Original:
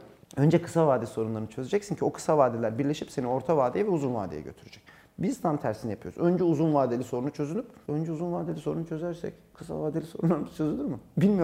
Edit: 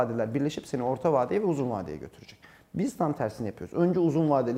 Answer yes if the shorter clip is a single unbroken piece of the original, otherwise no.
yes